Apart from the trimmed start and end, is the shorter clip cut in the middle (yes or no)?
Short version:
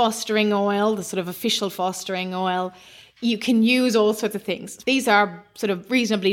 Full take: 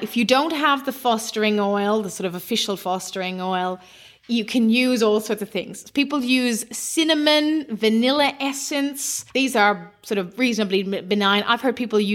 yes